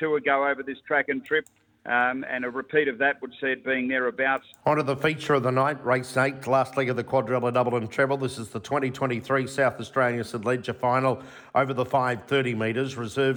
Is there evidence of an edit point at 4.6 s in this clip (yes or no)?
yes